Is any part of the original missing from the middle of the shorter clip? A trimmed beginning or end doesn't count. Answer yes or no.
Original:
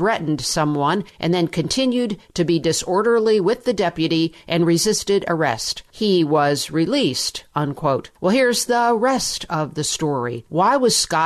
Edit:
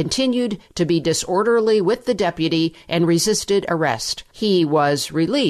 no